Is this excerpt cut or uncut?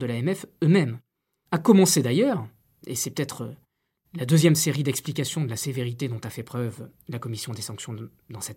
cut